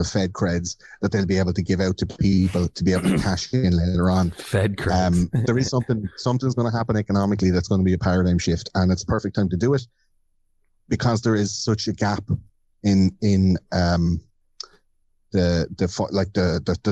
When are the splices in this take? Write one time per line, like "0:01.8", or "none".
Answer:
none